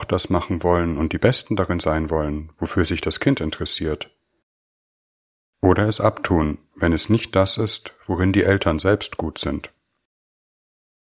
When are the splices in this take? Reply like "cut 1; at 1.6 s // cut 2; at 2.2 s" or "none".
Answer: none